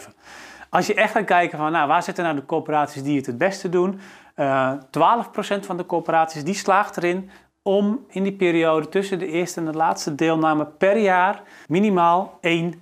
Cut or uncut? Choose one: cut